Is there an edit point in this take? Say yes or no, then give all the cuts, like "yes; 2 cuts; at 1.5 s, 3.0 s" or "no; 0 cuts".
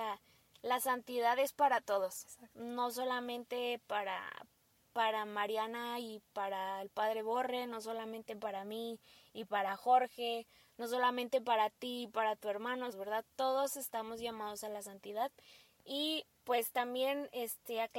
yes; 1 cut; at 12.9 s